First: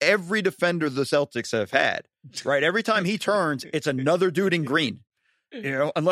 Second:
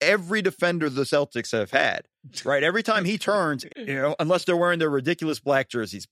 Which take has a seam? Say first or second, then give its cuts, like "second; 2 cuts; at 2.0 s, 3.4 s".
second; 1 cut; at 3.7 s